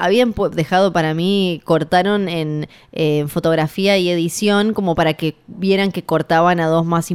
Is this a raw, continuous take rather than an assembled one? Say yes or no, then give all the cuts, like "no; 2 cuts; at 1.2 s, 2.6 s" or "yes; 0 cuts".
yes; 0 cuts